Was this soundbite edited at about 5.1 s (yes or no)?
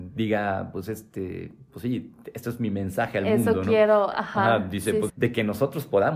yes